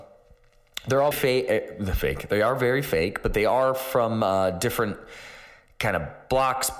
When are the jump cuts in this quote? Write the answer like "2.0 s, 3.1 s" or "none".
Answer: 1.1 s